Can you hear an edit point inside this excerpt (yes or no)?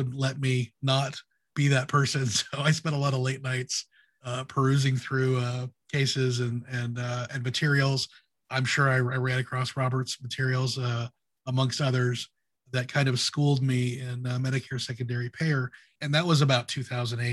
no